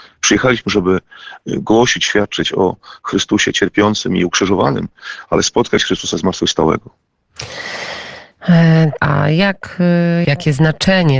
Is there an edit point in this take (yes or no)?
yes